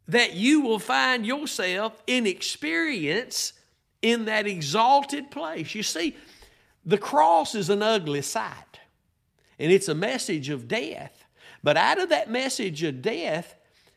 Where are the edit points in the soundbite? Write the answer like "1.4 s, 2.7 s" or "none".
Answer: none

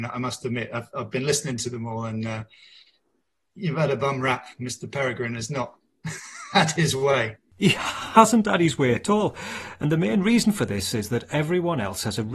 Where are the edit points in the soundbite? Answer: none

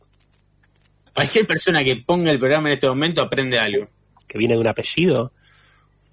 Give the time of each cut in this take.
1.1 s, 4.2 s

